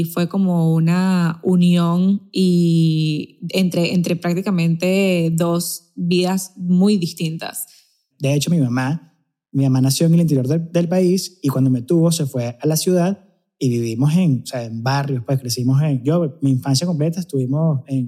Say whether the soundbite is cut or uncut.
cut